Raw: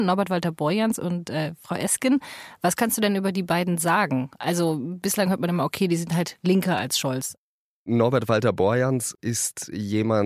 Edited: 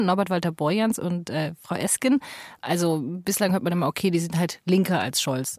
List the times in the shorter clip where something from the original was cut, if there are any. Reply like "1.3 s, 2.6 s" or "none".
2.6 s